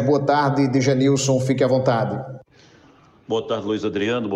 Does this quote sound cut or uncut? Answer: uncut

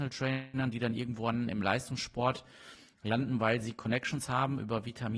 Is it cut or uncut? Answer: uncut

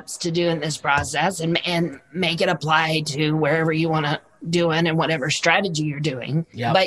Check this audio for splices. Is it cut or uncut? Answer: uncut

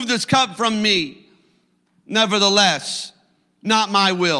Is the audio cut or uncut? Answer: uncut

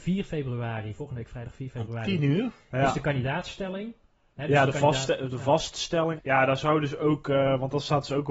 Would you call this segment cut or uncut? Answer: cut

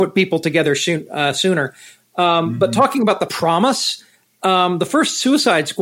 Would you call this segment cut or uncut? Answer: uncut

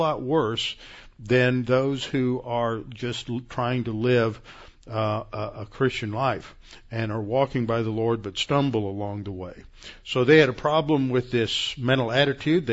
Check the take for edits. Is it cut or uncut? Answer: uncut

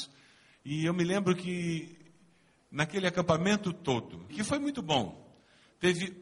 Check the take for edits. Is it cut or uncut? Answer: cut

